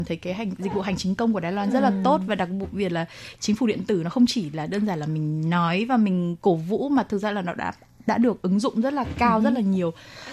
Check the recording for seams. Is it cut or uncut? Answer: uncut